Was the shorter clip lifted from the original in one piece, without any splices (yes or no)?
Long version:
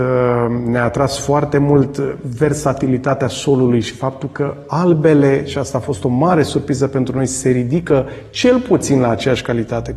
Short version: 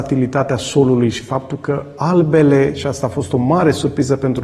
yes